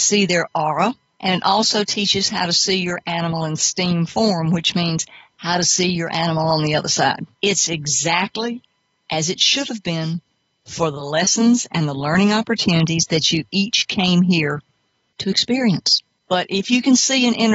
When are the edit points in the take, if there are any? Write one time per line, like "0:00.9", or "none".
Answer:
0:07.3
0:16.2